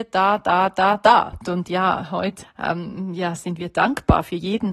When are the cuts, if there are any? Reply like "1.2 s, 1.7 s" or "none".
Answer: 1.4 s, 2.4 s